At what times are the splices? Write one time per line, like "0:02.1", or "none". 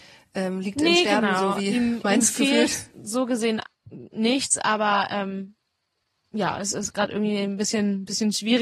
none